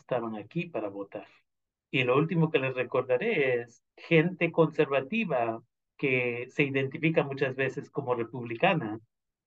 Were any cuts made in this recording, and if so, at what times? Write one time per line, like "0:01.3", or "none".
0:01.8
0:03.9